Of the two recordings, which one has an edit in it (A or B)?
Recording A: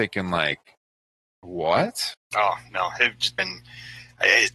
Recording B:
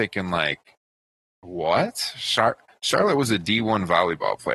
A